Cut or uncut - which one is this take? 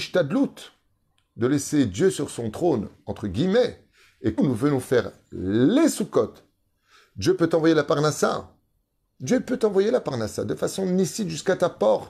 cut